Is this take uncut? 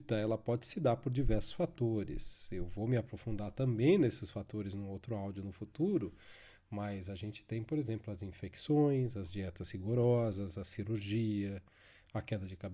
yes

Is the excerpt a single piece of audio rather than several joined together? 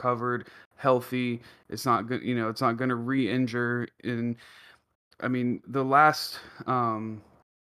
no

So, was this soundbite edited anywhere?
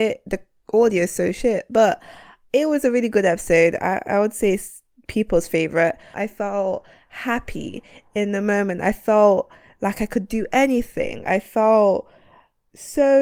yes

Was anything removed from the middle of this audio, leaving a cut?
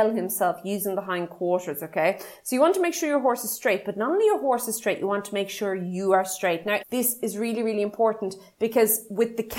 yes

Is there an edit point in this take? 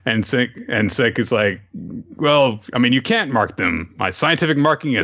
no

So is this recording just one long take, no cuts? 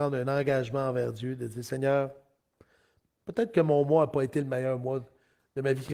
yes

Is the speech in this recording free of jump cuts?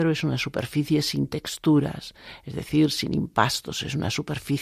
yes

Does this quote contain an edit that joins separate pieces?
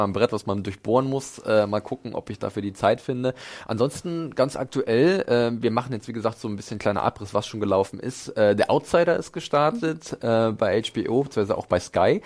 no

